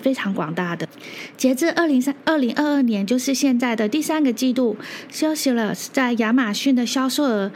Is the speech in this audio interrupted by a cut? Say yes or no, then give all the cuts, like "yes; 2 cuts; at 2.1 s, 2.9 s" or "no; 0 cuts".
yes; 1 cut; at 2.0 s